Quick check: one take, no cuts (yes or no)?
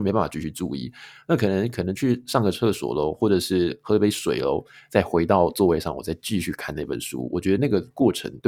yes